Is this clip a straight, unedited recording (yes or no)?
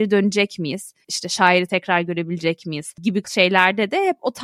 no